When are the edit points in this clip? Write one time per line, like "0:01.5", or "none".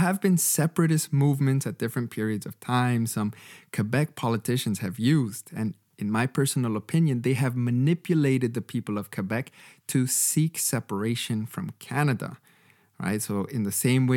none